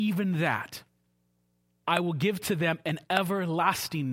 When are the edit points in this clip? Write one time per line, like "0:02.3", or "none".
0:01.8